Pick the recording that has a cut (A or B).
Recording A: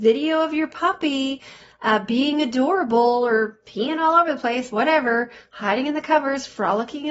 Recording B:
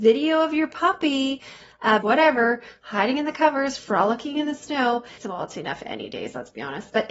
B